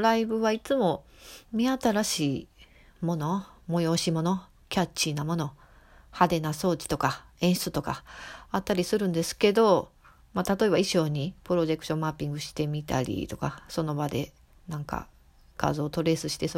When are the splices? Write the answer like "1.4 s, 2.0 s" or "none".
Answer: none

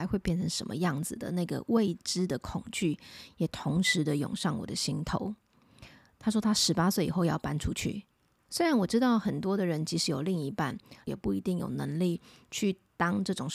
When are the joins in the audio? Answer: 8.5 s, 11.1 s

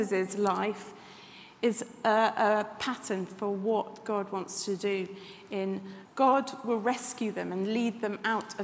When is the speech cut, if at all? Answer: 6.0 s

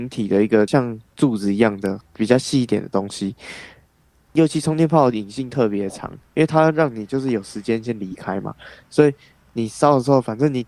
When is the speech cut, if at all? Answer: 4.3 s

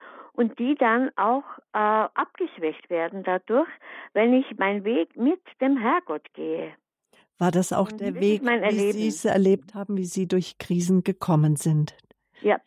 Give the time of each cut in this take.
none

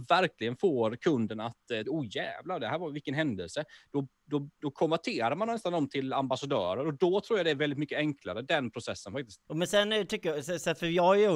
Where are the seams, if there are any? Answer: 1.8 s, 9.5 s

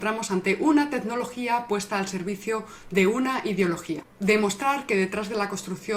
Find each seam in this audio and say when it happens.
none

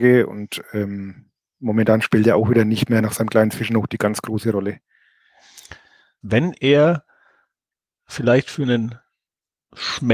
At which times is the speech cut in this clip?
6.2 s

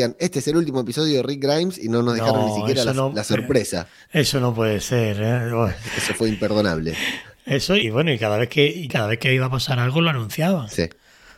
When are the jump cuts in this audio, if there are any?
7.8 s, 8.9 s

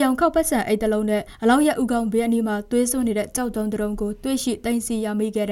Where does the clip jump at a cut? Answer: none

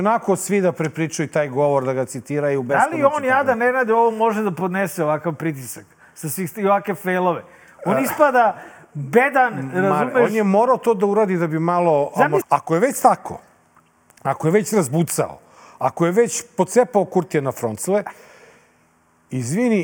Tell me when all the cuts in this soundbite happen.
12.4 s

